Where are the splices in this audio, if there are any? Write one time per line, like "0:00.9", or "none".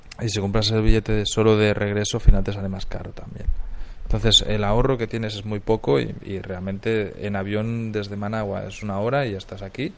none